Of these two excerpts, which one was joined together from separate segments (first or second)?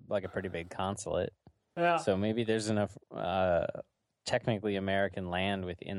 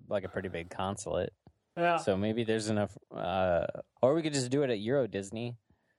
second